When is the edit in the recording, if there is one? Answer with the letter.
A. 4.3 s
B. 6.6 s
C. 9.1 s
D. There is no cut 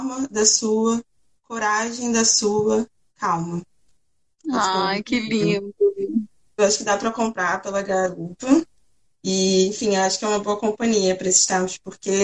B